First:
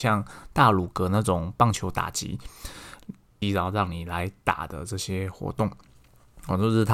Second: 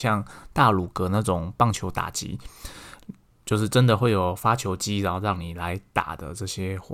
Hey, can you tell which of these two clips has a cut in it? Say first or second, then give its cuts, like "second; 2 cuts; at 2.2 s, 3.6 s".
first; 1 cut; at 3.4 s